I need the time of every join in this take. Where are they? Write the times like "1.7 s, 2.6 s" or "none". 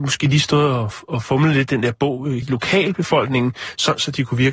2.4 s